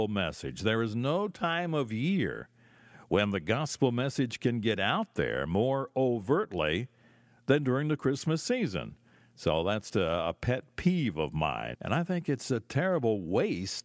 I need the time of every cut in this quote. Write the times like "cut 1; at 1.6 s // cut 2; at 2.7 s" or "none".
cut 1; at 9.9 s // cut 2; at 11.7 s